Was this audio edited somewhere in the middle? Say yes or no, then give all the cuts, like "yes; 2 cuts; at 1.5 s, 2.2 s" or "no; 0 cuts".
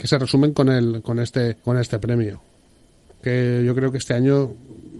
yes; 1 cut; at 1.6 s